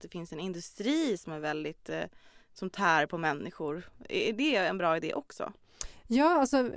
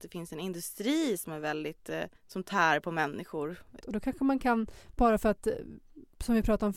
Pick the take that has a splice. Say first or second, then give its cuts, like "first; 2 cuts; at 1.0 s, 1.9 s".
second; 2 cuts; at 2.2 s, 3.8 s